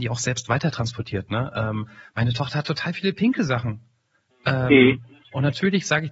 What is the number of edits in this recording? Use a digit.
0